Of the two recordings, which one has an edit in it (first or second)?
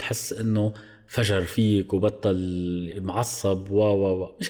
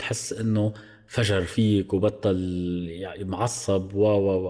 first